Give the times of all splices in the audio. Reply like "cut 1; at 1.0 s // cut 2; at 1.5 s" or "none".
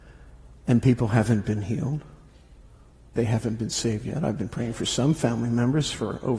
cut 1; at 3.2 s